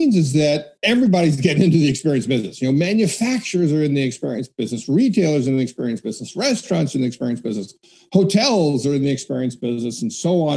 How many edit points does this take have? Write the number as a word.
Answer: zero